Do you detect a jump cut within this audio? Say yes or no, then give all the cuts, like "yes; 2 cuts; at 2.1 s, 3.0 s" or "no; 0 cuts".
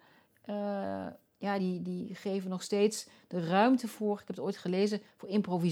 no; 0 cuts